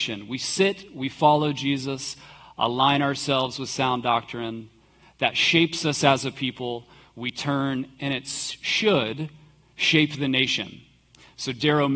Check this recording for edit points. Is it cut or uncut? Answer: uncut